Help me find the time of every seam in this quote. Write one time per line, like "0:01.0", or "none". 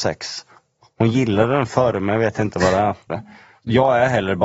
0:03.1

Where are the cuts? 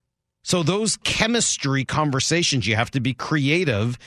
none

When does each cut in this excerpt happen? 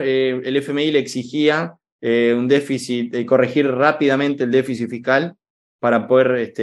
none

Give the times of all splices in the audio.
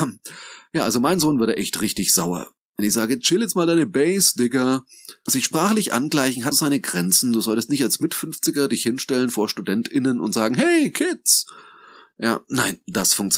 0:05.3
0:06.5

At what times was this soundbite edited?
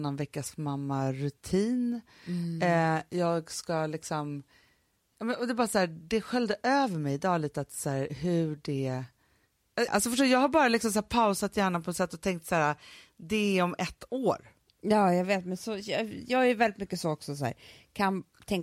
0:09.9

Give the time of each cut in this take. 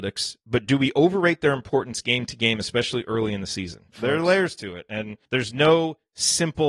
0:03.9
0:05.2

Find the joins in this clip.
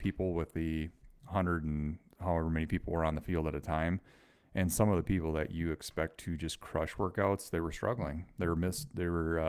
none

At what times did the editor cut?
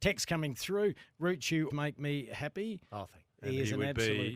0:01.7
0:03.3

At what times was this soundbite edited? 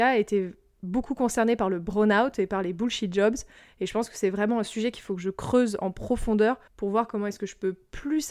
0:06.7

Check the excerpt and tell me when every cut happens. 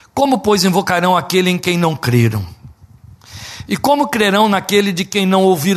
none

